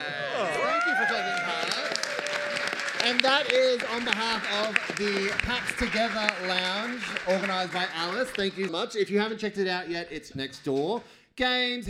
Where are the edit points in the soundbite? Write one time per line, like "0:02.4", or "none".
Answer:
0:08.7
0:10.3

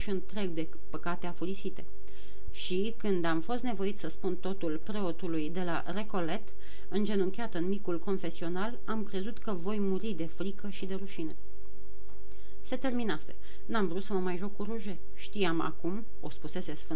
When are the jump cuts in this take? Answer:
0:02.5

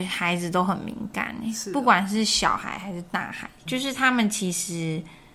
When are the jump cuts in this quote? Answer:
0:03.7

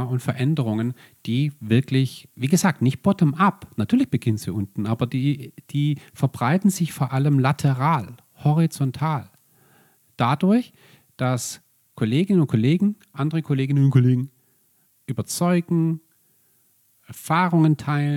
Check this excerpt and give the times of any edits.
none

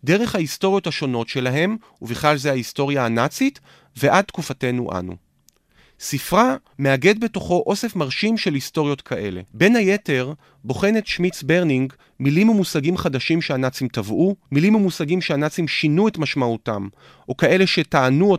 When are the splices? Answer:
0:06.7
0:09.5
0:14.4

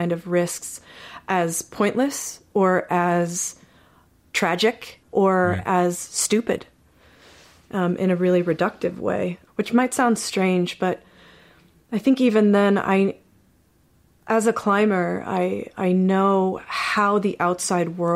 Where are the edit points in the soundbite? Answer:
0:05.0
0:09.5

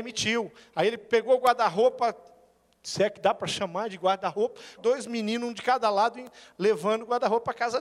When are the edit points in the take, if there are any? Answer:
0:04.8

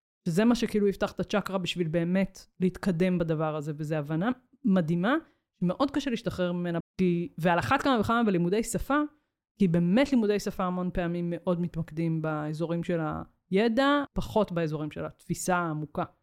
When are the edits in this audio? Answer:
0:06.8
0:14.1

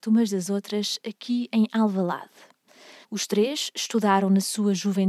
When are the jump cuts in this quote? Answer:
0:03.0

